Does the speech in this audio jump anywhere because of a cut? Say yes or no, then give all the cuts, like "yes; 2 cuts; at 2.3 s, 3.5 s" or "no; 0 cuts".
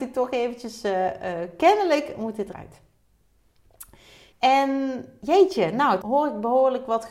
yes; 3 cuts; at 2.5 s, 4.3 s, 6.0 s